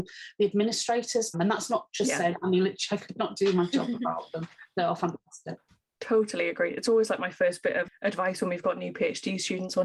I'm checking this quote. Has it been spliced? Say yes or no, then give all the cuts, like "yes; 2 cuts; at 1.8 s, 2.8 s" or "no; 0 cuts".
yes; 1 cut; at 1.3 s